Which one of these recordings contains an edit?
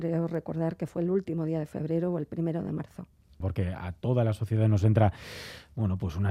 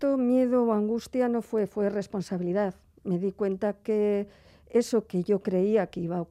first; 1 cut; at 3.4 s

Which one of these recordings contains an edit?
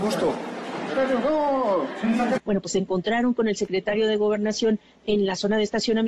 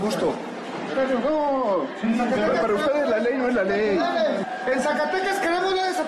first; 1 cut; at 2.4 s

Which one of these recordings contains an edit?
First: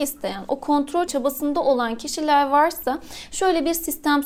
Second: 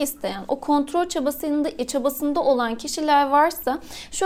first; 1 cut; at 1.1 s

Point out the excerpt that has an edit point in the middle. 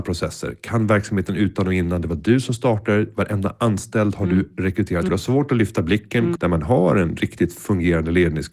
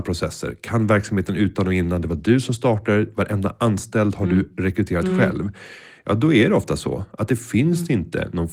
first; 2 cuts; at 5.1 s, 6.4 s

